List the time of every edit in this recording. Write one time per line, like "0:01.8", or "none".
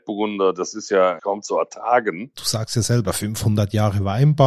0:01.2
0:02.3

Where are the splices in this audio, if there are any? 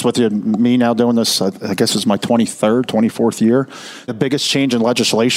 0:04.1

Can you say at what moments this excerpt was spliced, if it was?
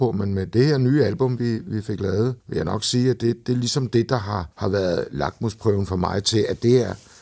0:02.4
0:04.5

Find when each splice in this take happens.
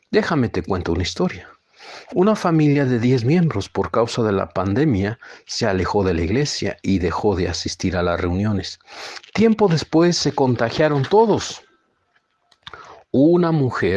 none

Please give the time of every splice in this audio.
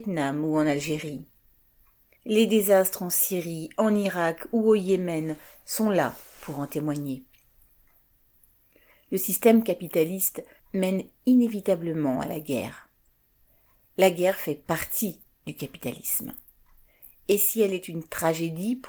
0:02.2
0:10.6

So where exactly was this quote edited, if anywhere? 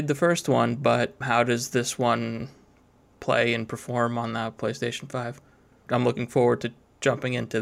0:01.2
0:05.9

